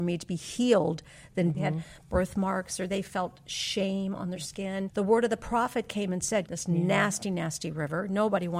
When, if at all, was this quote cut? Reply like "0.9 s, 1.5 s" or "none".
1.5 s, 4.9 s, 6.5 s